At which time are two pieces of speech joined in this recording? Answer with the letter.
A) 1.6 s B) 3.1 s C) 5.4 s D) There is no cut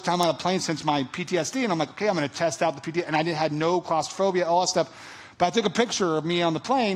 D